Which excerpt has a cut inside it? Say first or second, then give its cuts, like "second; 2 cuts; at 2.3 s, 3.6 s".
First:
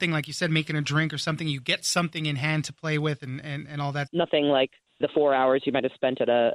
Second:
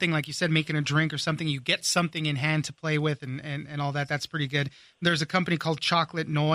first; 1 cut; at 4.1 s